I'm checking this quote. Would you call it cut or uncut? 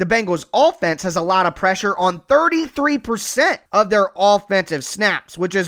cut